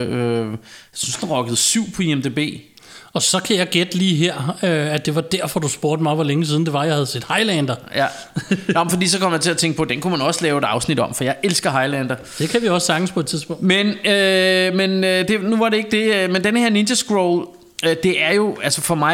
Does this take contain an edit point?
no; 0 cuts

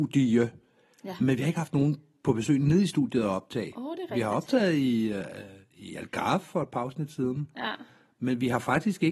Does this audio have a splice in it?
no; 0 cuts

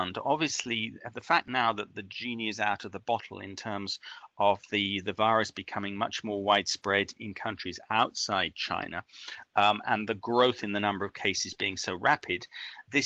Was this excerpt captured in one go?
yes; 0 cuts

